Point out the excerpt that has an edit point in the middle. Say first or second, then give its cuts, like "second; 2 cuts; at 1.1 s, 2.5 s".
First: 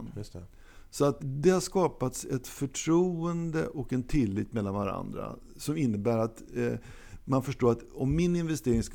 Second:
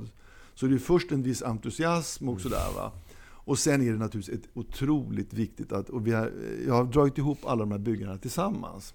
first; 1 cut; at 1.2 s